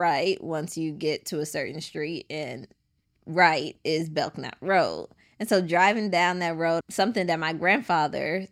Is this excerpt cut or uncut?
cut